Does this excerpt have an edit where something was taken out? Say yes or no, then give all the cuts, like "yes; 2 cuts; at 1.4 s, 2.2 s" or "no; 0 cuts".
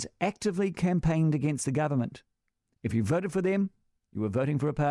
no; 0 cuts